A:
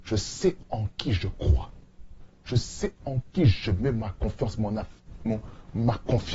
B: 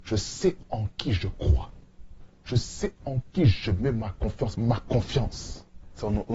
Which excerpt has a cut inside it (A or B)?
B